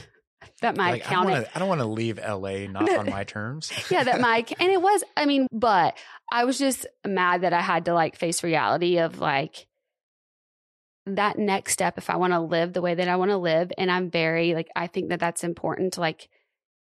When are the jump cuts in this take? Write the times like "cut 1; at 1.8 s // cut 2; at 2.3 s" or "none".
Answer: cut 1; at 5.5 s